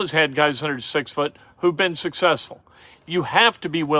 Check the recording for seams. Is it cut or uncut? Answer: cut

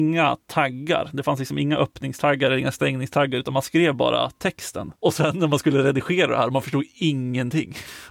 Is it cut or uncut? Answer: cut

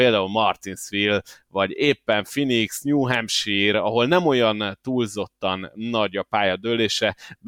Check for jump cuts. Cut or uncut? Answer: uncut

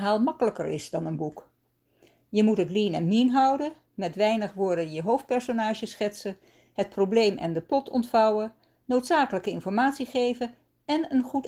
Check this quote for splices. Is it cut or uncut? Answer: uncut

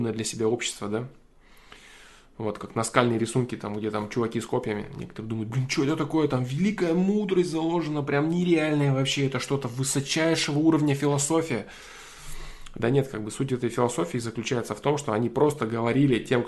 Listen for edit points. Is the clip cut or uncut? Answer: uncut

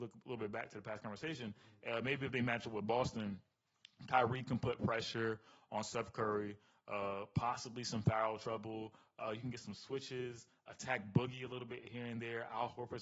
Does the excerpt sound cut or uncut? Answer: uncut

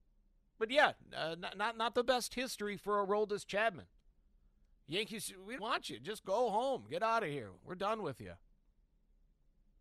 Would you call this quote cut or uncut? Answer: cut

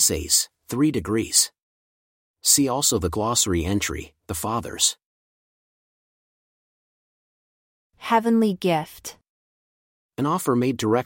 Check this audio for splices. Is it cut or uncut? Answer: uncut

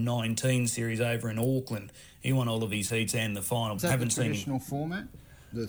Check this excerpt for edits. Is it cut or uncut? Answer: cut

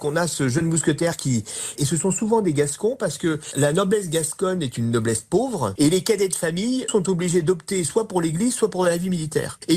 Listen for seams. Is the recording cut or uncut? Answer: cut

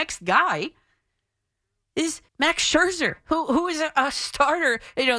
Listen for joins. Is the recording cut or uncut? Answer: cut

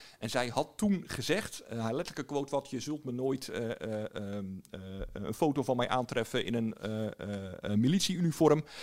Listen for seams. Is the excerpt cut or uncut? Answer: uncut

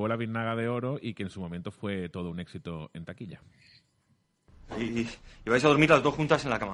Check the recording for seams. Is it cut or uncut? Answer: uncut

